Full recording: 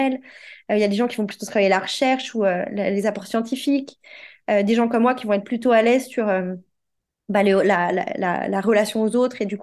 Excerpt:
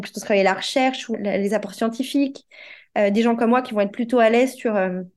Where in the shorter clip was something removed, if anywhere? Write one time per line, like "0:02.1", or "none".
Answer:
0:01.1